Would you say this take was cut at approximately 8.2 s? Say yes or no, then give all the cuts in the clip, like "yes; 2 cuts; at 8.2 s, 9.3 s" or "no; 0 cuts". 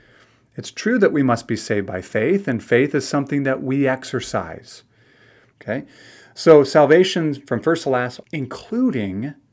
yes; 2 cuts; at 5.5 s, 8.2 s